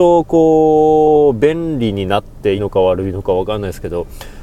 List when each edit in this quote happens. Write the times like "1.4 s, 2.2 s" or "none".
2.6 s